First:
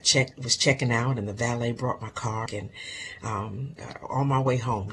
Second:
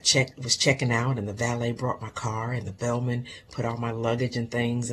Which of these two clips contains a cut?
first; 2 cuts; at 2.5 s, 3.8 s

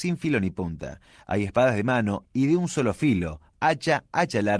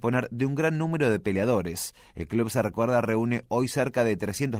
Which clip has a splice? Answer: first; 2 cuts; at 2.2 s, 3.5 s

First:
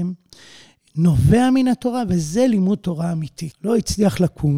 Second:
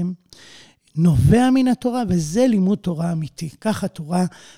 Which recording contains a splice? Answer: first; 1 cut; at 3.5 s

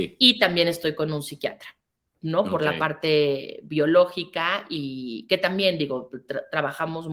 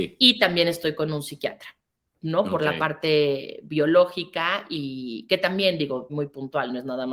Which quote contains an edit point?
second; 1 cut; at 6.1 s

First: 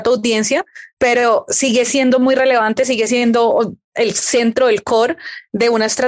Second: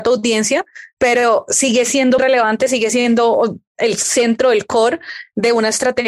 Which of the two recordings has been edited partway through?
second; 1 cut; at 2.2 s

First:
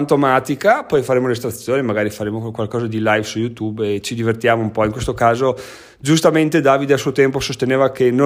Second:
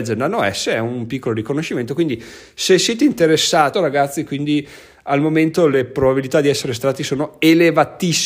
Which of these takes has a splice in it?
second; 1 cut; at 3.7 s

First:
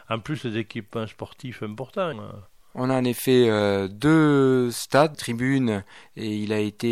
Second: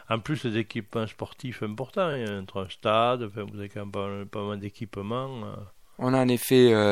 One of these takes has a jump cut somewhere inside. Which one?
first; 2 cuts; at 2.1 s, 5.1 s

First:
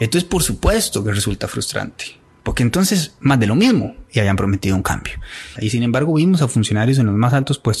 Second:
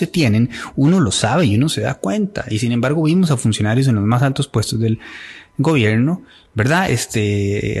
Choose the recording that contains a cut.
first; 1 cut; at 5.6 s

